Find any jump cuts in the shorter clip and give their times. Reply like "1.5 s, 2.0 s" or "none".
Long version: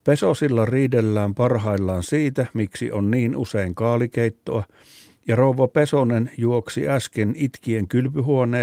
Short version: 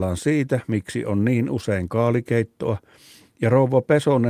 none